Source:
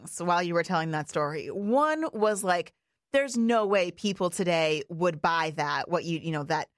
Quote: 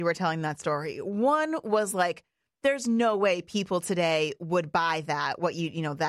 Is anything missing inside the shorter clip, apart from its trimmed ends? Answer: no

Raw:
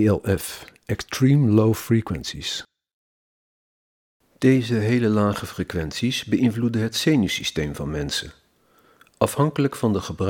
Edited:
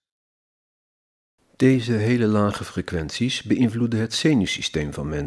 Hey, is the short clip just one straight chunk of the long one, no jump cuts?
yes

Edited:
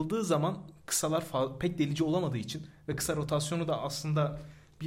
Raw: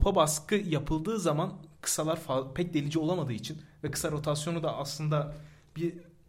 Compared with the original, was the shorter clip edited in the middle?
no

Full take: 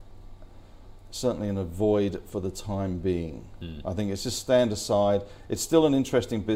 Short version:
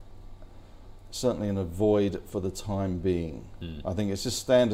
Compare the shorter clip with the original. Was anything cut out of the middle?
no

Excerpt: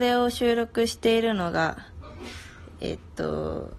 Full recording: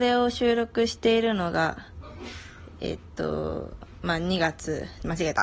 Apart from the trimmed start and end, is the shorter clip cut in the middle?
no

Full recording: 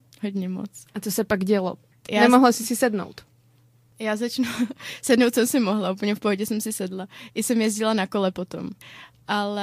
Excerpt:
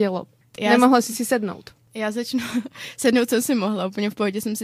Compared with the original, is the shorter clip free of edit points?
no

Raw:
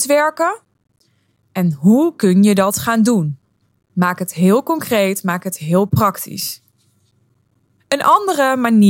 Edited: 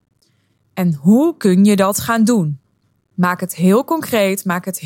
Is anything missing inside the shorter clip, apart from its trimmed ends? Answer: no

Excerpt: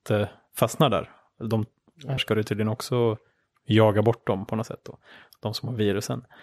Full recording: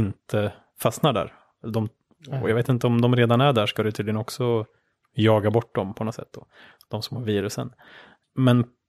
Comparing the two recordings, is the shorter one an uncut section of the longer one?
no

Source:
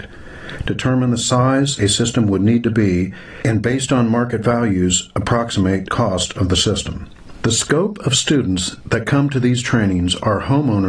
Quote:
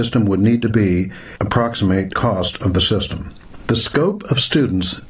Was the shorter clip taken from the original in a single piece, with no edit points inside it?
no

